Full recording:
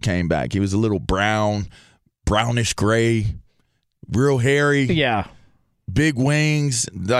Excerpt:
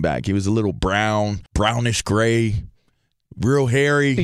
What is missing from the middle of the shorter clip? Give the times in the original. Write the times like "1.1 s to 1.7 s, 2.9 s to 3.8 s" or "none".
1.7 s to 2.2 s